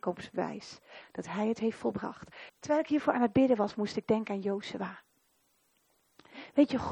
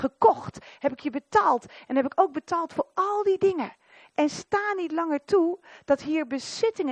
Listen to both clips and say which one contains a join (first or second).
first